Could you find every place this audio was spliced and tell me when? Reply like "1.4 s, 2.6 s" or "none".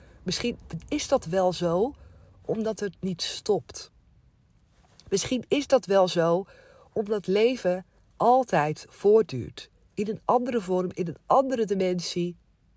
none